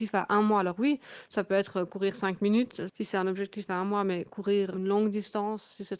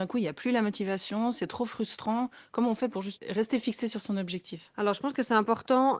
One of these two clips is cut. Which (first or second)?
first